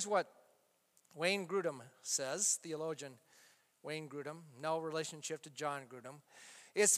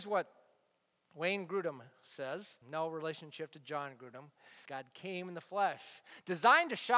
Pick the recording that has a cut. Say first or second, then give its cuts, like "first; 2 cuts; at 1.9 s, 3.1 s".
second; 2 cuts; at 2.6 s, 4.6 s